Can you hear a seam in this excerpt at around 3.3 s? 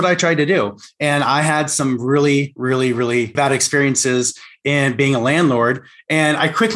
yes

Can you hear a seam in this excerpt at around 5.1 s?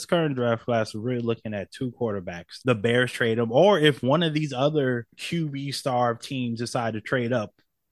yes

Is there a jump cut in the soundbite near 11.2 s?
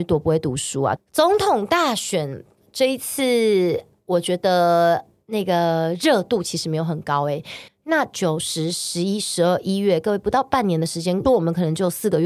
yes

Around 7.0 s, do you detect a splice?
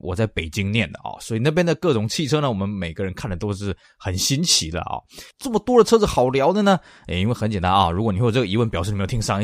no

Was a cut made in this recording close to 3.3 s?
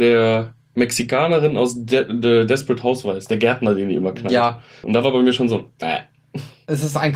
no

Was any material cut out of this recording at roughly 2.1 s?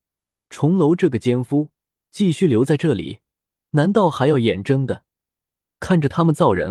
no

